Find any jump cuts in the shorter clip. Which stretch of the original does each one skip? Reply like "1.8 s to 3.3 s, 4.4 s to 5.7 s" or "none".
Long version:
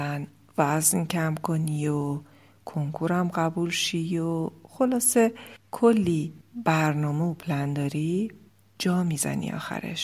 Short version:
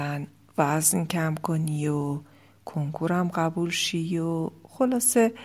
none

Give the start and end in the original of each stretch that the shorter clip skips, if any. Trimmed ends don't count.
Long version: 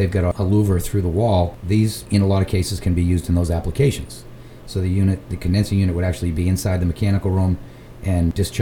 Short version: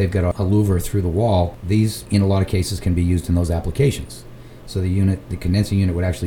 none

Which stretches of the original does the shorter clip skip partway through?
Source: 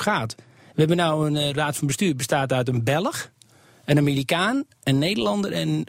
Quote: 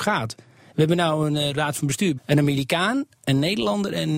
2.2 s to 3.8 s

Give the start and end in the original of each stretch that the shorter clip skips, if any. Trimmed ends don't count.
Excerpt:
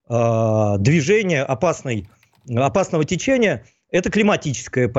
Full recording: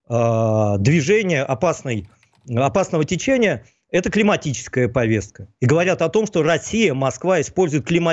none

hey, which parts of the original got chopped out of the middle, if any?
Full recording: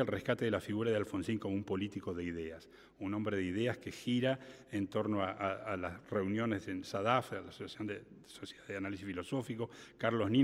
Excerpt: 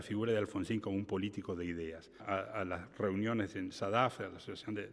2.8 s to 5.3 s

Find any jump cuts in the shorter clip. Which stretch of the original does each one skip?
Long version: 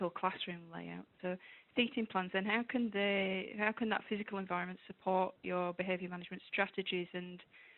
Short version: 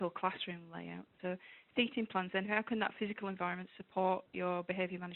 2.4 s to 3.5 s

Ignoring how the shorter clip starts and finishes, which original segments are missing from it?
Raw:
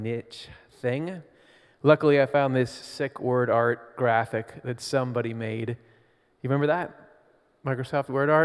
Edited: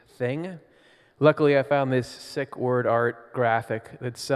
none

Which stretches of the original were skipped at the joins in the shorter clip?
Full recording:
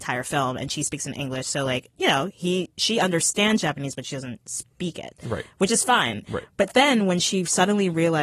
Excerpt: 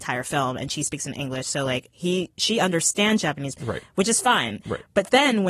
1.9 s to 2.3 s, 3.9 s to 5.2 s

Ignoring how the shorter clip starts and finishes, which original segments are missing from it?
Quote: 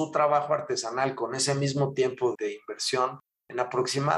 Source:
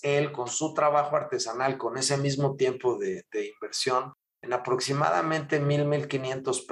3.0 s to 3.3 s

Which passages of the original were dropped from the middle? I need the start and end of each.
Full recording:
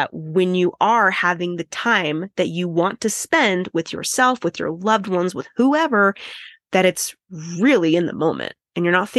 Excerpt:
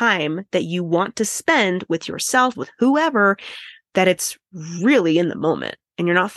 4.4 s to 5.3 s

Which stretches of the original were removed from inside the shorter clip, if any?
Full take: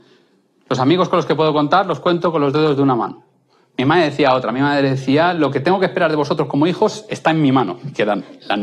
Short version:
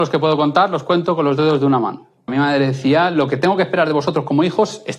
3.4 s to 4.5 s

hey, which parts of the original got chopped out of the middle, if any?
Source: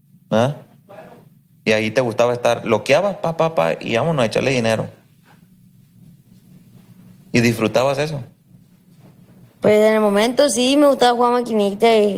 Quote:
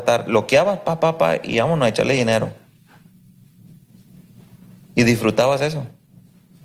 none

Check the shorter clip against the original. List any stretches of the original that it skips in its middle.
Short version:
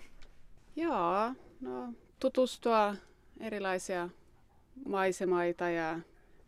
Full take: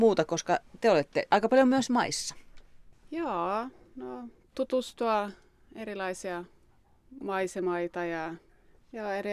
none

